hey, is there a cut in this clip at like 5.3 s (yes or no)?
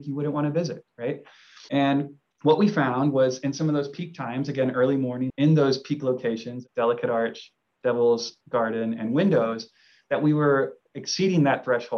yes